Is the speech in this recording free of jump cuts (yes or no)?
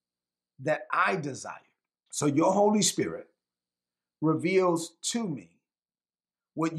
no